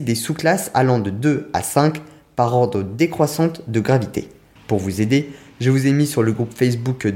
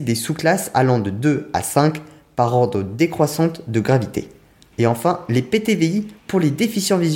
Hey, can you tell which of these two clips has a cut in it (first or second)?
first